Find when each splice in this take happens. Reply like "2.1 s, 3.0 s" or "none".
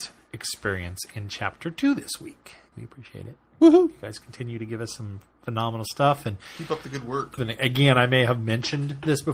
2.7 s, 7.4 s